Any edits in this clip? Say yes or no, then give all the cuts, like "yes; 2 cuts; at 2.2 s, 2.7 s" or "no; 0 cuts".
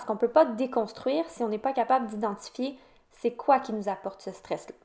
no; 0 cuts